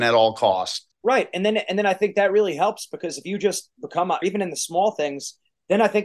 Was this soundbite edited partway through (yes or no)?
yes